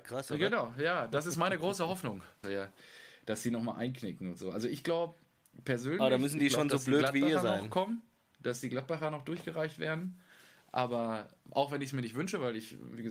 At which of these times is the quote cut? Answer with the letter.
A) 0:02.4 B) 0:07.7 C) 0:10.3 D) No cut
A